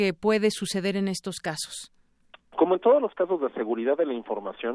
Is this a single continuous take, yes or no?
yes